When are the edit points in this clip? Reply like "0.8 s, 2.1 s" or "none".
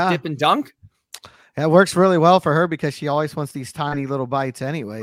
none

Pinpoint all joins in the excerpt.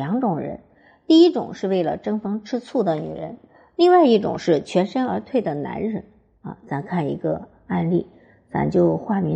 none

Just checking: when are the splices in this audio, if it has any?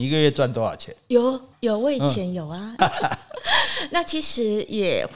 1.5 s, 2.8 s

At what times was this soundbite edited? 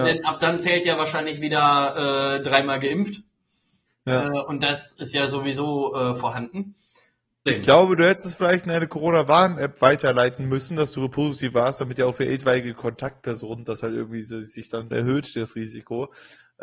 7.5 s, 14.9 s

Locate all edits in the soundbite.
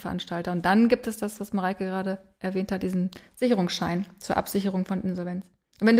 none

